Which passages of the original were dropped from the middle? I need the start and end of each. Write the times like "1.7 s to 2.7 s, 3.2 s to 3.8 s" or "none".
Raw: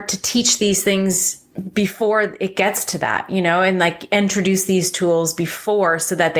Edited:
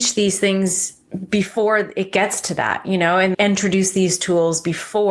3.8 s to 4.1 s